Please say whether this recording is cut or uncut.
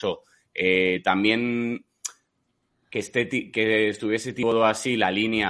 uncut